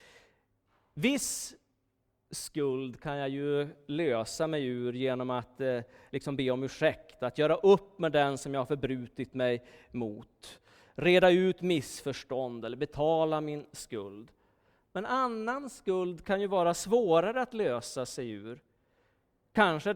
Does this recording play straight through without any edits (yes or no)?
yes